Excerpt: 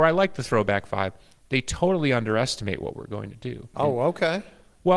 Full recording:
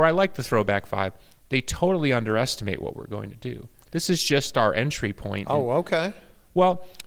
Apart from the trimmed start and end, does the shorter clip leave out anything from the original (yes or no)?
yes